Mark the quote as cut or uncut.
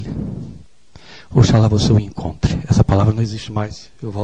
uncut